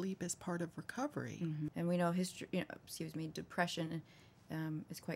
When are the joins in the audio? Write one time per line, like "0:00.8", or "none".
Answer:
0:01.7